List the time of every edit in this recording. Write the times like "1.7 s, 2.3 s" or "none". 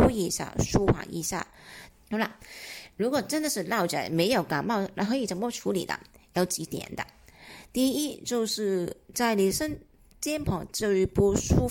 1.9 s

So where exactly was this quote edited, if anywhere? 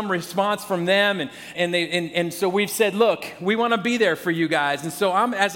1.5 s

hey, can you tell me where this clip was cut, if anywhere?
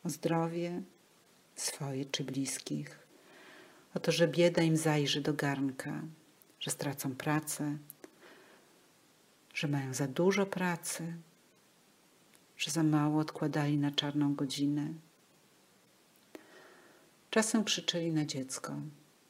none

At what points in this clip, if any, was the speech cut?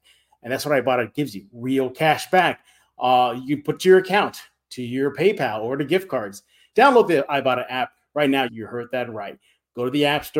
6.7 s, 8.5 s

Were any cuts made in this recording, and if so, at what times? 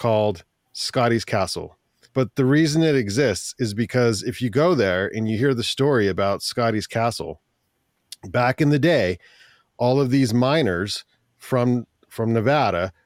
2.1 s

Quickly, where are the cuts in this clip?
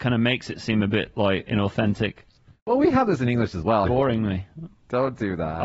1.5 s, 3.8 s

